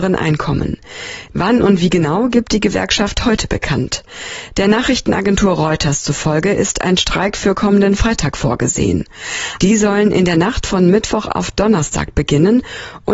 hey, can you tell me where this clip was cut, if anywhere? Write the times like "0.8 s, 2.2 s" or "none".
1.3 s, 9.6 s